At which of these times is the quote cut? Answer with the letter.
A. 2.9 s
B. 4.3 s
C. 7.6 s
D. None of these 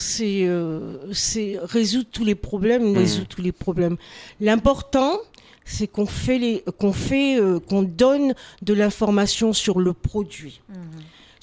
A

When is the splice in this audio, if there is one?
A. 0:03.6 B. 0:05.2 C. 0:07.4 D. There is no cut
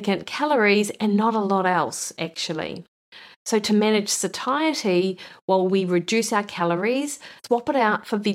C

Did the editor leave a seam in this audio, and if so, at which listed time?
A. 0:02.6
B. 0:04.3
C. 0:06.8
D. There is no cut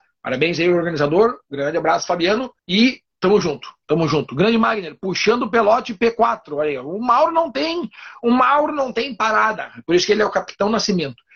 A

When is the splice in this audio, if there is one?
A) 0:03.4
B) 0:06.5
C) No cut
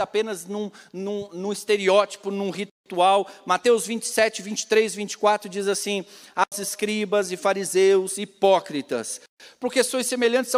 B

